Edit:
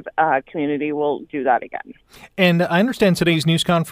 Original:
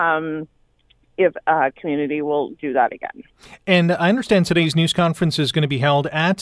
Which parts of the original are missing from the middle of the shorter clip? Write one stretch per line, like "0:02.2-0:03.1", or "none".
none